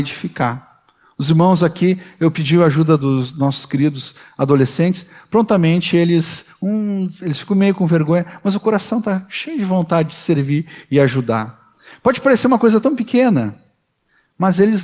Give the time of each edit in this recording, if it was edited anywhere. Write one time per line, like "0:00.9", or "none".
none